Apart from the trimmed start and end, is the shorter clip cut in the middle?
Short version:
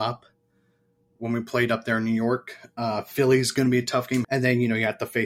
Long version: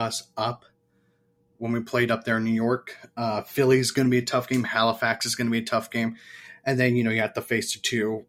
yes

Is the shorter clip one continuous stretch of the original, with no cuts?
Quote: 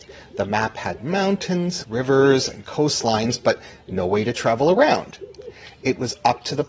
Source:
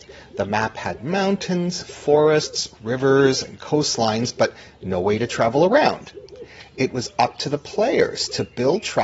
no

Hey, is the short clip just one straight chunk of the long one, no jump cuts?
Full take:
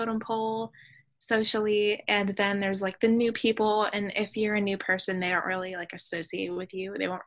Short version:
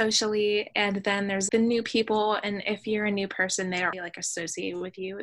no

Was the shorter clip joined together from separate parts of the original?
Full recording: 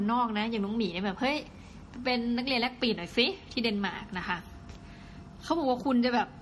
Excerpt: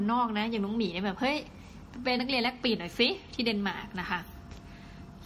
yes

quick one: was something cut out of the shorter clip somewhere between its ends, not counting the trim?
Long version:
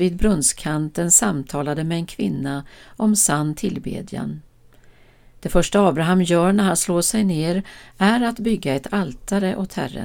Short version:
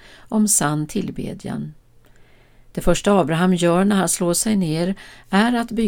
no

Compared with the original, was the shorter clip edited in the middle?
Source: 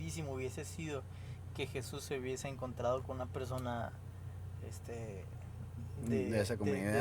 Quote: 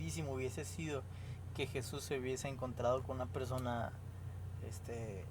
no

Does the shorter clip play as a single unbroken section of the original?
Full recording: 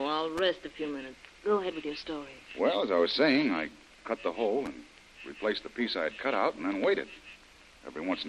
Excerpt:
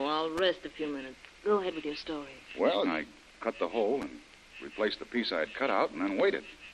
no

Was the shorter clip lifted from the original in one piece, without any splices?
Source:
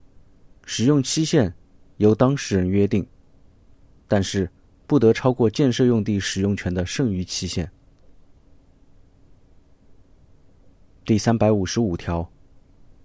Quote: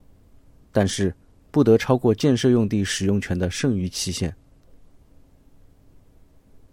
yes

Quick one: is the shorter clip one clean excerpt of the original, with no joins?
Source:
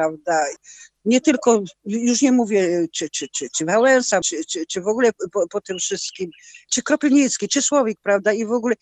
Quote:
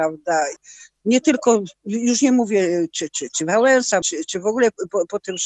no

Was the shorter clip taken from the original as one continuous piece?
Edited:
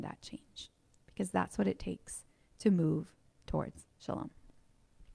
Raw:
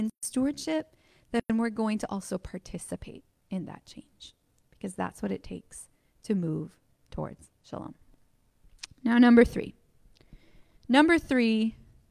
yes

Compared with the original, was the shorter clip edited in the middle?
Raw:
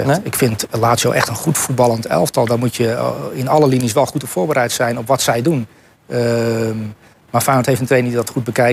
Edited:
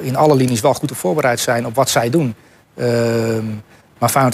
no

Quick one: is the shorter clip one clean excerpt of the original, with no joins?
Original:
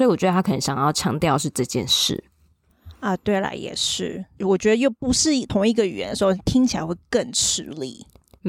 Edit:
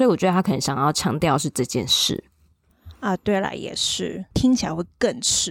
no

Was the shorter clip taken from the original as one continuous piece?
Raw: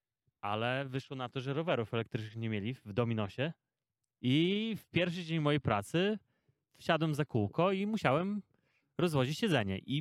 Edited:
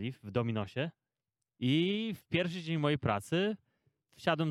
yes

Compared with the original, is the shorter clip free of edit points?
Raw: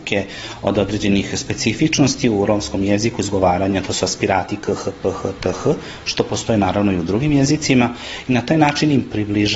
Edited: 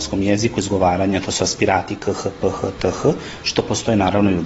yes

